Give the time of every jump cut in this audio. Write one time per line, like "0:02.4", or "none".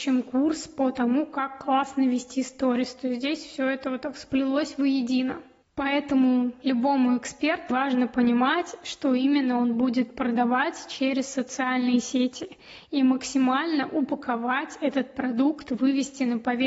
0:07.7